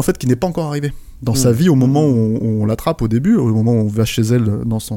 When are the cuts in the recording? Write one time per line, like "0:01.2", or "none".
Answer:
none